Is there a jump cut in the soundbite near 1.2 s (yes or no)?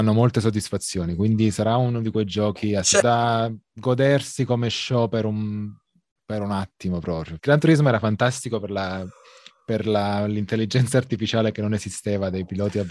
no